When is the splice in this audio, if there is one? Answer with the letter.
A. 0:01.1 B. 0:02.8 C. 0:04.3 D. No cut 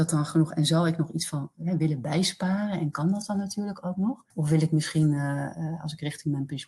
C